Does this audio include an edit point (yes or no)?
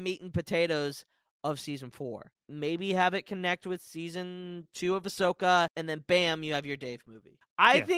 no